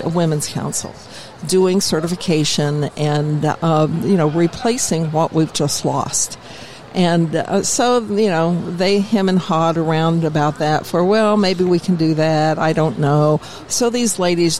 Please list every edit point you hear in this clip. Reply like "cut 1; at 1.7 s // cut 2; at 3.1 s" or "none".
cut 1; at 13.6 s

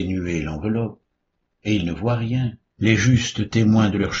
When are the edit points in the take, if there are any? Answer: cut 1; at 2.7 s

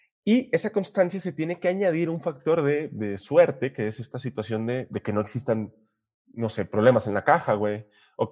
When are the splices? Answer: none

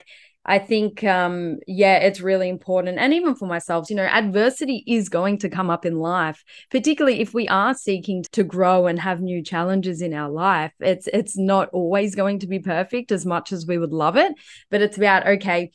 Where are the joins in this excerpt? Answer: cut 1; at 3.9 s // cut 2; at 8.3 s

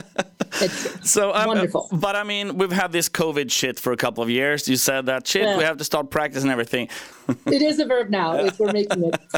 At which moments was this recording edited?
cut 1; at 7.1 s

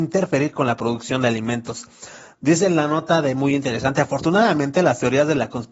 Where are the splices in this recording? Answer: none

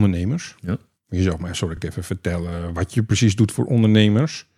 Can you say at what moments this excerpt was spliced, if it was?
none

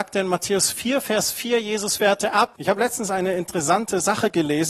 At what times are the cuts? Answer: cut 1; at 2.6 s

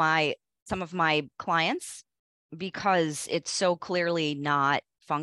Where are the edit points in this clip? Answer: none

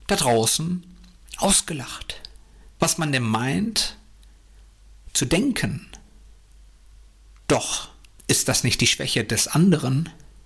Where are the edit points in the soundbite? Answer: none

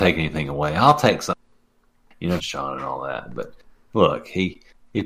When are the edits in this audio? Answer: cut 1; at 2.4 s

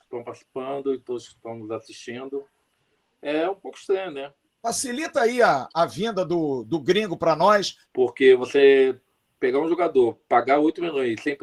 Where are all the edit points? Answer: cut 1; at 4.4 s // cut 2; at 7.9 s

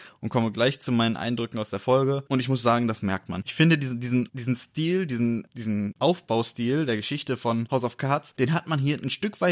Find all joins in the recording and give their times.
cut 1; at 2.3 s

